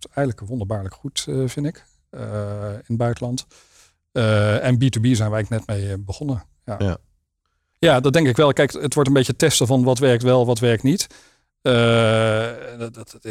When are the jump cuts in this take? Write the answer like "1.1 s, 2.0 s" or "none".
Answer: 7.7 s